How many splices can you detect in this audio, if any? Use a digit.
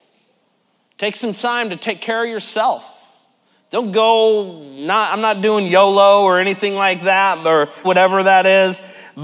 1